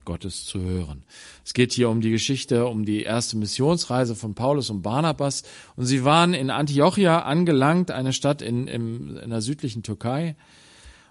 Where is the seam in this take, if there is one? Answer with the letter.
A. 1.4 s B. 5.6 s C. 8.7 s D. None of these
D